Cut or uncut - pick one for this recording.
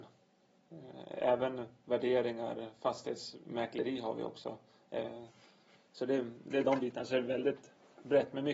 uncut